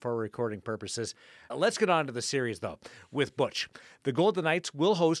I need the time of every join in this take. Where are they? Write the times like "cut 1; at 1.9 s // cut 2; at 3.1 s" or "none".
cut 1; at 1.5 s